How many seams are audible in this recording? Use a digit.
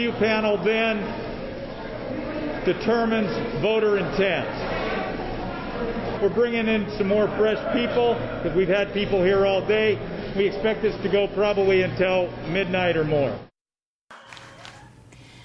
1